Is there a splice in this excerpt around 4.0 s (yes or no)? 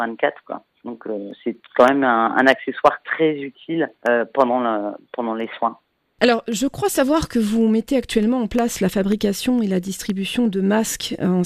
yes